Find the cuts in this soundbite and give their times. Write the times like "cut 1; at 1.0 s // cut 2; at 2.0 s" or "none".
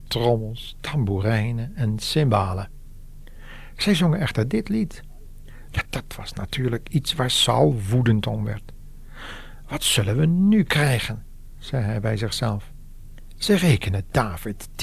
cut 1; at 5.7 s